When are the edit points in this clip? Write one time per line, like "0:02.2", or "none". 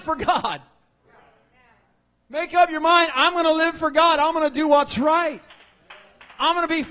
none